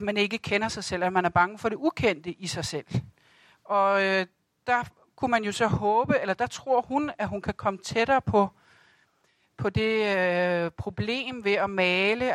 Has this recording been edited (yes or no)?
no